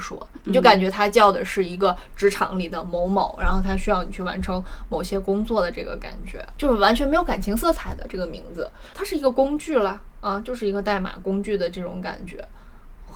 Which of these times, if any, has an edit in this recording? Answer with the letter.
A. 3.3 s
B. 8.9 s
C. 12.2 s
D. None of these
B